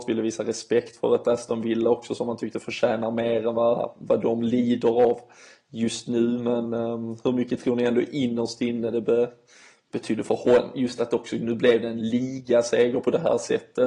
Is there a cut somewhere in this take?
no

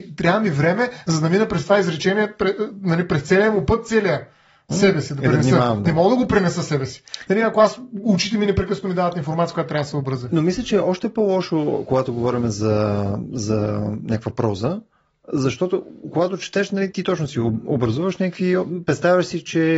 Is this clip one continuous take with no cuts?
no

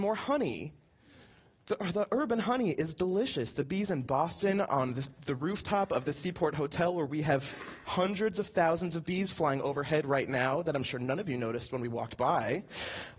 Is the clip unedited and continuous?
yes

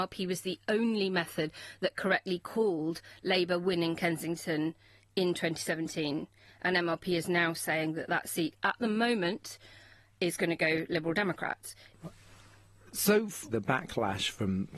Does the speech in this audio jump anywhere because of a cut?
yes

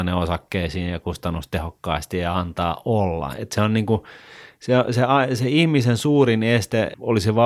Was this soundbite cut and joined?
no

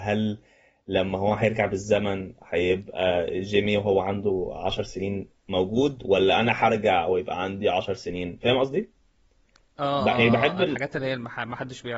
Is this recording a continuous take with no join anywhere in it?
yes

